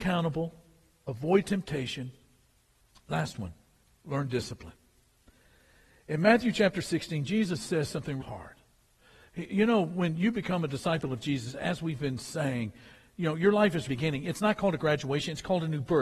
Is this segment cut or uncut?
cut